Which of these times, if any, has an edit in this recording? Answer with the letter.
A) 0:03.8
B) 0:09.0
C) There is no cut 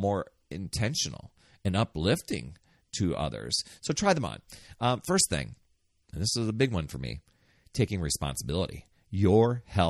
A